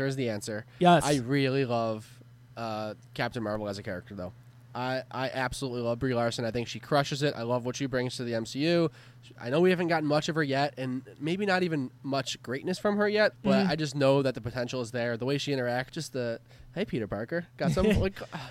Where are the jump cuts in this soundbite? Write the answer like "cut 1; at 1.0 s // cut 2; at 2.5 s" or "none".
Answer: cut 1; at 13.3 s // cut 2; at 15.9 s